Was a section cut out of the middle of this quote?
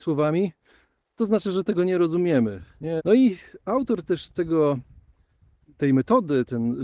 yes; 1 cut; at 3.0 s

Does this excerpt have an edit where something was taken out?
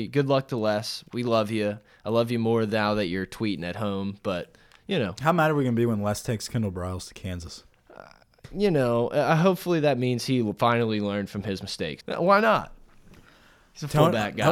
yes; 1 cut; at 12.0 s

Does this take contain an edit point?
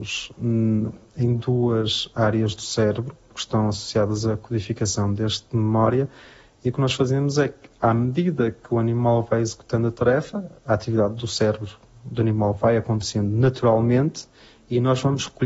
yes; 1 cut; at 5.5 s

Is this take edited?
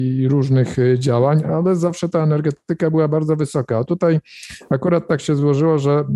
no; 0 cuts

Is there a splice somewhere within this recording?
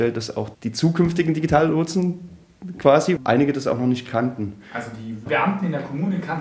yes; 1 cut; at 3.2 s

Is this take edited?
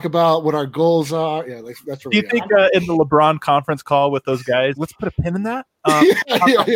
yes; 1 cut; at 4.8 s

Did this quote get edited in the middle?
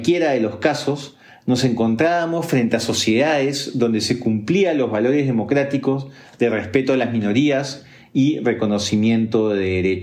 no; 0 cuts

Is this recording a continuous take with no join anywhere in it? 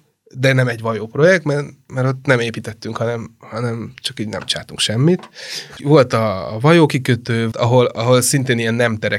no; 2 cuts; at 1.9 s, 7.5 s

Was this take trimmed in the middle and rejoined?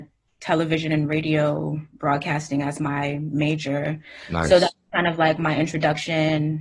no; 0 cuts

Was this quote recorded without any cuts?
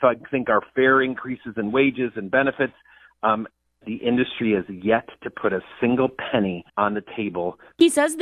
no; 2 cuts; at 3.8 s, 6.7 s

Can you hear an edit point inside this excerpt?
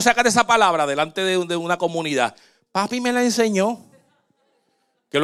no; 0 cuts

